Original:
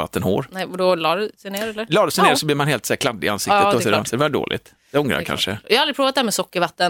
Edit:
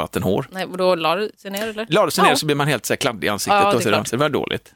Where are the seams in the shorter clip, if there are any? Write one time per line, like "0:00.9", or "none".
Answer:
none